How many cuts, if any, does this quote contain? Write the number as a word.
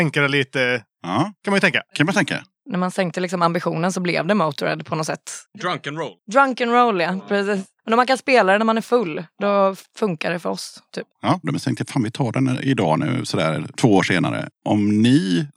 two